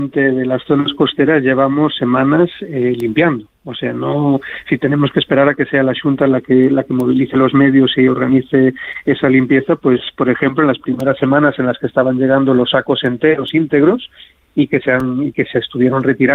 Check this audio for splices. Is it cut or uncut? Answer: uncut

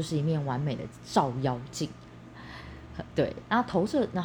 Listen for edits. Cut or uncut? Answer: uncut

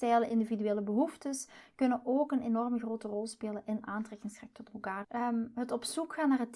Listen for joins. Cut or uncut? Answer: cut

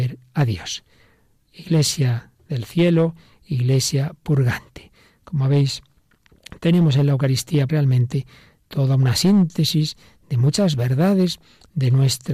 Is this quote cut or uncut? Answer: cut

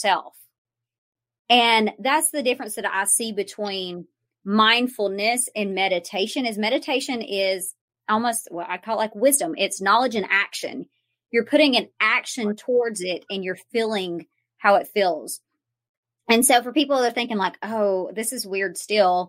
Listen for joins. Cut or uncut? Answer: uncut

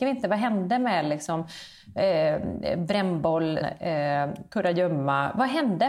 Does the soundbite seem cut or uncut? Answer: cut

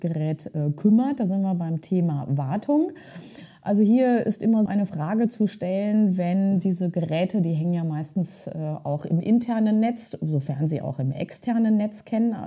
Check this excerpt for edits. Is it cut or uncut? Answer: cut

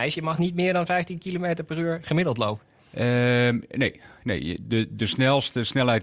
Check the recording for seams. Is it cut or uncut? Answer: uncut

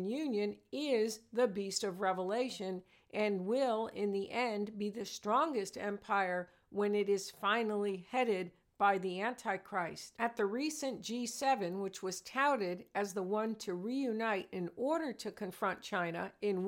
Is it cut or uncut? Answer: uncut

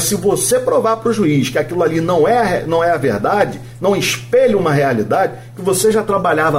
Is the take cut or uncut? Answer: uncut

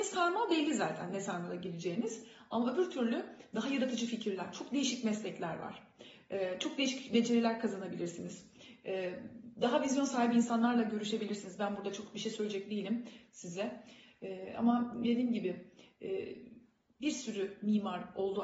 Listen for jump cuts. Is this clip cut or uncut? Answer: uncut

